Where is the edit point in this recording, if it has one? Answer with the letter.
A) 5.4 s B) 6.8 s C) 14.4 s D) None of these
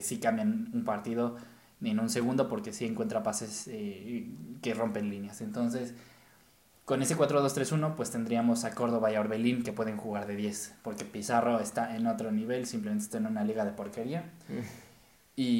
D